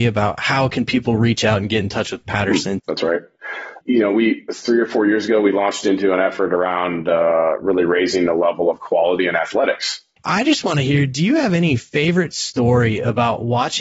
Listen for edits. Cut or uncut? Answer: cut